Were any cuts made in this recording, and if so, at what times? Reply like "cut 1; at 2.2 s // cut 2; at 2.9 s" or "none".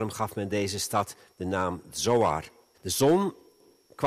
cut 1; at 2.7 s